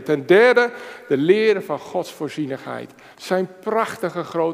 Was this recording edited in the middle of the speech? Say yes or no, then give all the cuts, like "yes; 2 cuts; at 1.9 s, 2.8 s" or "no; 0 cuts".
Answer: yes; 1 cut; at 3.1 s